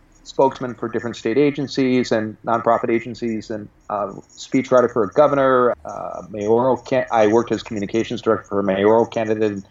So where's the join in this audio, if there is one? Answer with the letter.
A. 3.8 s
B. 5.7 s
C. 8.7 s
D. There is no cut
B